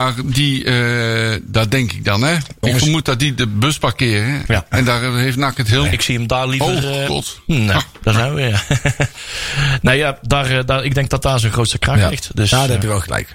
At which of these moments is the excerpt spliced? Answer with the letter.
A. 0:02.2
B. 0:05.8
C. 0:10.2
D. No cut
B